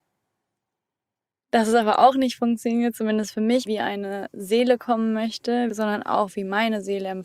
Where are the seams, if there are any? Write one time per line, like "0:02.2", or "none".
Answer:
0:03.7
0:05.7